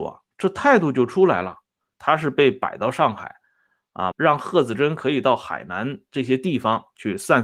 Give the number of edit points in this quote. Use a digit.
2